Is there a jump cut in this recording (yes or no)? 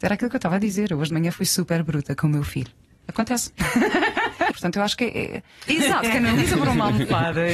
yes